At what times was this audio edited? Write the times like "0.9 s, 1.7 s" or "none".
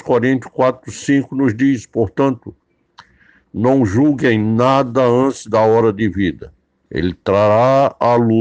6.9 s